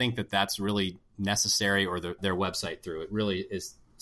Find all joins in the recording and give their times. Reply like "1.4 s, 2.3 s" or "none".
2.2 s